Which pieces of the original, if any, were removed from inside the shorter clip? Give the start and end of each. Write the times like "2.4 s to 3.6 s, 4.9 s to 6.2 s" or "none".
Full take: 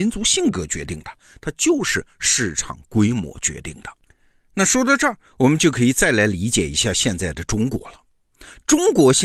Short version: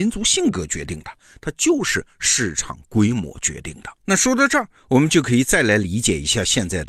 4.0 s to 4.5 s

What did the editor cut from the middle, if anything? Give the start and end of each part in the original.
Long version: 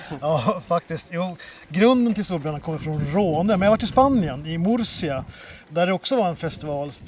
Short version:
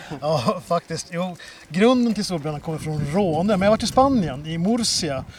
none

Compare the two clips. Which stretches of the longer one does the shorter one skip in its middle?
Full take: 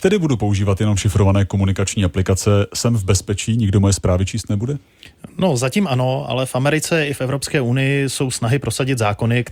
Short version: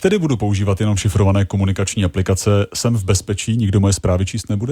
none

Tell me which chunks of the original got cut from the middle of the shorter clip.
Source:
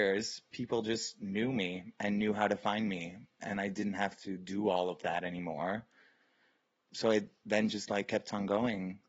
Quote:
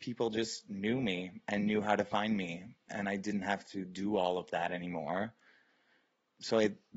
none

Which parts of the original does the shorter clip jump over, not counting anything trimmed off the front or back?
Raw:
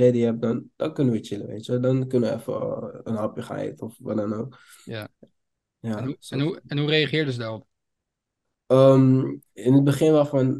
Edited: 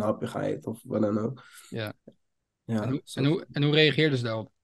none

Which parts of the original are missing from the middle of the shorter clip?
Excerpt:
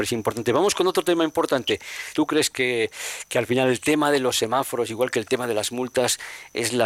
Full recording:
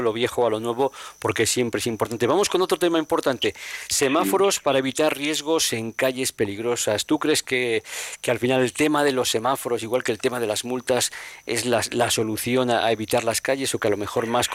3.9 s to 7.1 s

